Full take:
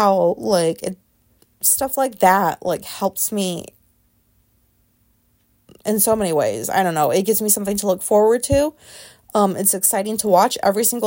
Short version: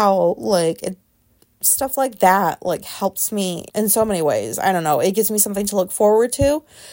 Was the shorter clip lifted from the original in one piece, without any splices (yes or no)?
no